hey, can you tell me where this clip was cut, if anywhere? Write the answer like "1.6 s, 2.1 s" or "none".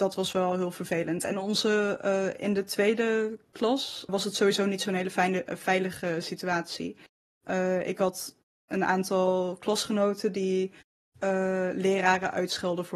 4.1 s

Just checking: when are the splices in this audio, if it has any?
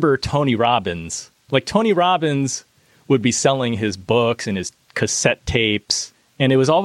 none

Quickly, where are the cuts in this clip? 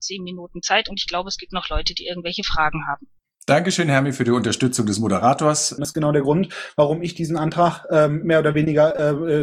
5.8 s

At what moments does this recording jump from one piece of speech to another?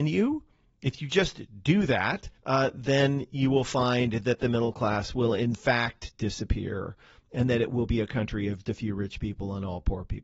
2.4 s, 8.6 s

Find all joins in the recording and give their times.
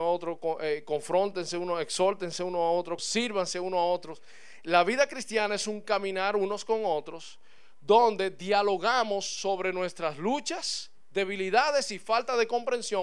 3.0 s

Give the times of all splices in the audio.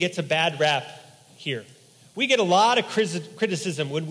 none

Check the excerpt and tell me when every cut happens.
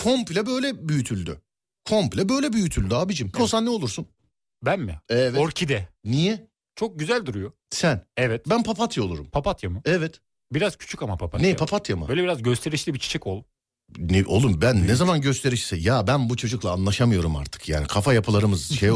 3.3 s

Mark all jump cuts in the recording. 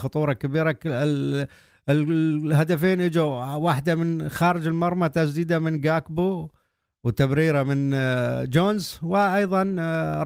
none

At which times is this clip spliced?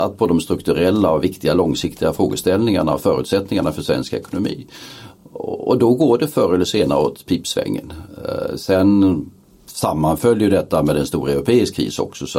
none

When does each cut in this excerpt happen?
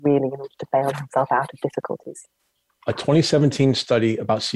2.7 s

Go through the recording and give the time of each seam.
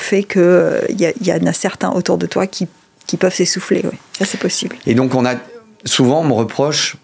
4.8 s

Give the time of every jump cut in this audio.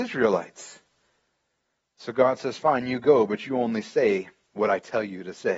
none

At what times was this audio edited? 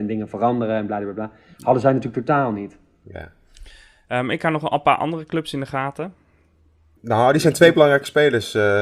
7.0 s

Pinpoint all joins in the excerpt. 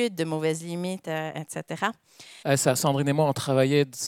2.4 s

